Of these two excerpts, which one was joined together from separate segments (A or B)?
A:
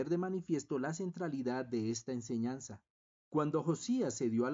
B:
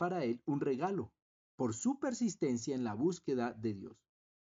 A